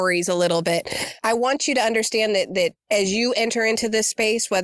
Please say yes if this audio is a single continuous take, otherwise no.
yes